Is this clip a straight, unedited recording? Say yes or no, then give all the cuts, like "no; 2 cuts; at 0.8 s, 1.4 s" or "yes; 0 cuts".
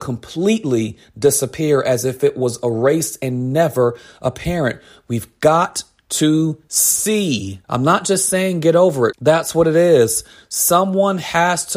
no; 2 cuts; at 7.6 s, 9.1 s